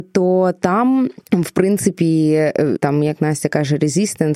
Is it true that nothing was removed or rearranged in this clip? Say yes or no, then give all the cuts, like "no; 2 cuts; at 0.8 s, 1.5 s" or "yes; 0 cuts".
no; 2 cuts; at 1.3 s, 2.8 s